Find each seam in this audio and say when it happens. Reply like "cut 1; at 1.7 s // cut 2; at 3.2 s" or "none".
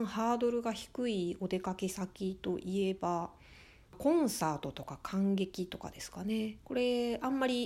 cut 1; at 6.6 s